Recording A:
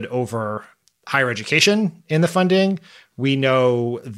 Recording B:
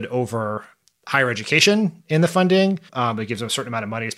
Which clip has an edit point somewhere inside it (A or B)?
B